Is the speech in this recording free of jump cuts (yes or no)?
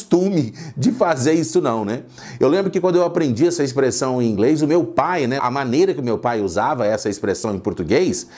no